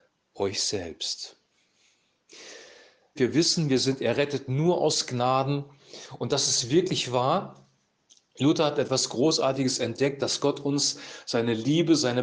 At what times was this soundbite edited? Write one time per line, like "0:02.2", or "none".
0:03.2